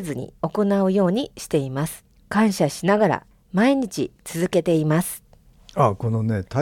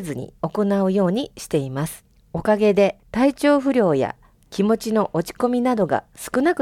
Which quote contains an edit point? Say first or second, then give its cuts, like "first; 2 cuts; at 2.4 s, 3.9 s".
first; 1 cut; at 2.2 s